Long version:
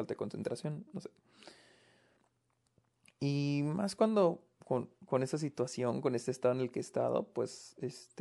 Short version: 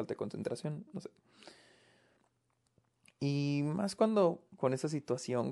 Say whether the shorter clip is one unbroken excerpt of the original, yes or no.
no